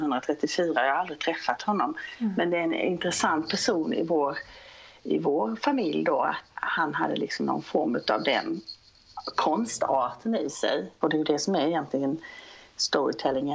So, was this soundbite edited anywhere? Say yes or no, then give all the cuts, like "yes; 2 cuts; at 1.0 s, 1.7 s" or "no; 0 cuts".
yes; 1 cut; at 11.0 s